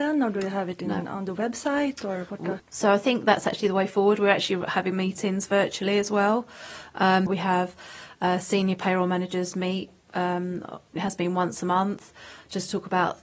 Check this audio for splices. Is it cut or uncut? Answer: cut